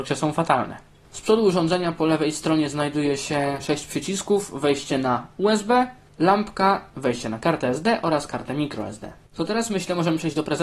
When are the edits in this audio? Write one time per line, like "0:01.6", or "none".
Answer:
0:09.3